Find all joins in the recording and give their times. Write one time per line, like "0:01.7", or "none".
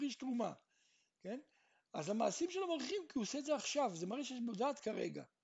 none